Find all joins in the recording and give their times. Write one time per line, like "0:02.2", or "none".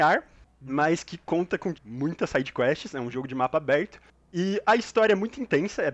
0:01.7